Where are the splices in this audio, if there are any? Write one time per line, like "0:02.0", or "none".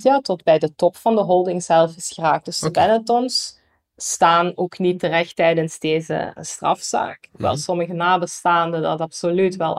0:06.4